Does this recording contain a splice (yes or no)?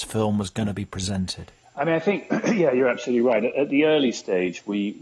no